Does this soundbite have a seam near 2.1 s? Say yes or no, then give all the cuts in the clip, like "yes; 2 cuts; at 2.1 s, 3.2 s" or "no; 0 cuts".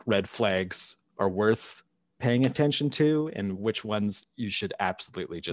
no; 1 cut; at 4.2 s